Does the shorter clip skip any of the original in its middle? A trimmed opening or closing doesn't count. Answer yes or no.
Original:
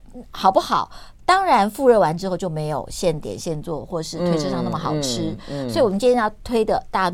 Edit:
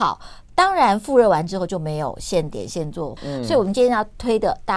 yes